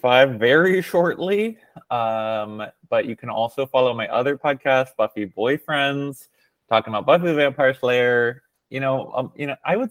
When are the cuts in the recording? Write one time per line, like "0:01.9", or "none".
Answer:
none